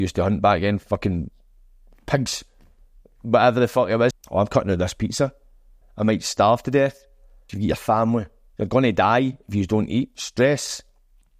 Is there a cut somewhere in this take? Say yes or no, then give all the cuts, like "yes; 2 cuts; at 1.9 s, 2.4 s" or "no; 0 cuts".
yes; 3 cuts; at 4.1 s, 5.8 s, 7.5 s